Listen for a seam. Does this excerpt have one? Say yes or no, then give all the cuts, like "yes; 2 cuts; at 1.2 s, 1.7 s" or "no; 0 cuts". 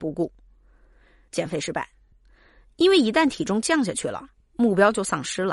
yes; 1 cut; at 1.3 s